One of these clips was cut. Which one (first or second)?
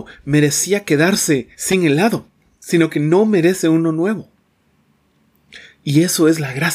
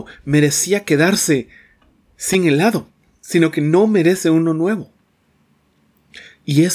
first